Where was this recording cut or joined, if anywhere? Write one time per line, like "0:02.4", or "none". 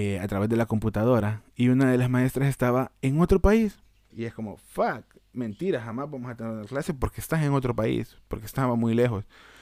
0:04.1